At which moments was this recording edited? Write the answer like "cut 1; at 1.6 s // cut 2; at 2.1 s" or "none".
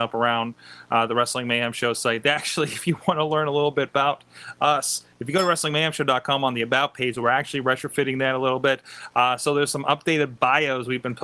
none